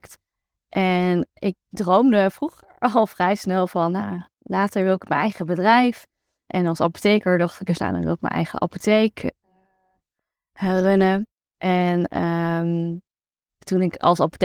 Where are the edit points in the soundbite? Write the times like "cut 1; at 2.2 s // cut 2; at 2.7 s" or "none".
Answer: cut 1; at 1.3 s